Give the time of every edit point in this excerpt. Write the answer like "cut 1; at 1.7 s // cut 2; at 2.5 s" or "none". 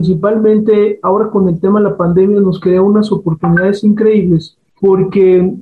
none